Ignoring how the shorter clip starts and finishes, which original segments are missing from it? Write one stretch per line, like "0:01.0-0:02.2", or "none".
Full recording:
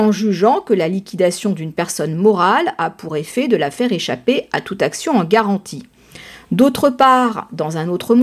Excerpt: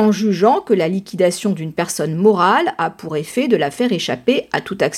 none